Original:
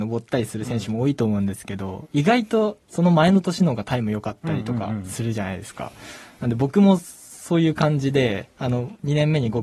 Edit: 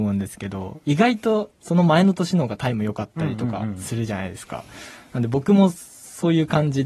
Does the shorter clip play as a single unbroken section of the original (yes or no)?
yes